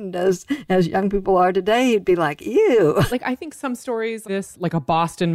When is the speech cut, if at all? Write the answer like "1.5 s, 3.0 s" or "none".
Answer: 3.1 s, 4.2 s